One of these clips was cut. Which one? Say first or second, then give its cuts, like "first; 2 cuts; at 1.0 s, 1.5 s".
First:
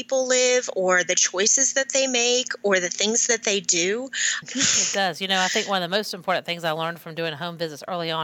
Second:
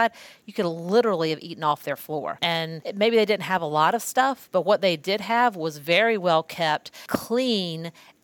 first; 1 cut; at 4.4 s